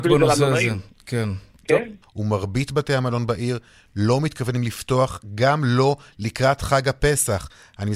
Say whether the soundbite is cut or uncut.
cut